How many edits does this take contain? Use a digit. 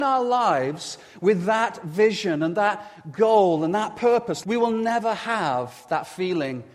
1